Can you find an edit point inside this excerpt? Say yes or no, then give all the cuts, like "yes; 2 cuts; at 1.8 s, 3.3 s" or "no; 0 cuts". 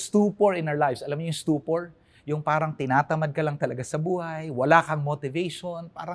no; 0 cuts